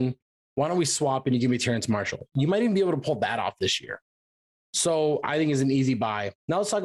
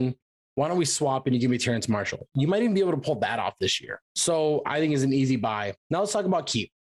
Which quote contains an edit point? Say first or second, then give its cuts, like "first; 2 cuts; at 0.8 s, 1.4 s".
second; 1 cut; at 4.0 s